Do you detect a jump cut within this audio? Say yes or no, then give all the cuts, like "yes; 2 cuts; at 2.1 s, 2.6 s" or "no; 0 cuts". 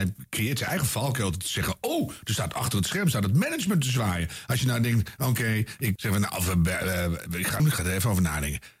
yes; 2 cuts; at 6.0 s, 7.6 s